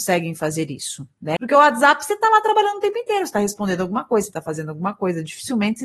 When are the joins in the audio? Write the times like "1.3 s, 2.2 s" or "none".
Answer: 1.4 s